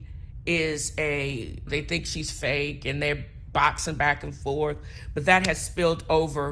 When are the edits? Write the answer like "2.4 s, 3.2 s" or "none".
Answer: 1.7 s